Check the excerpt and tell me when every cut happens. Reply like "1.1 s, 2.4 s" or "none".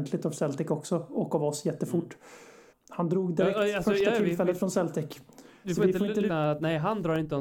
2.7 s, 6.3 s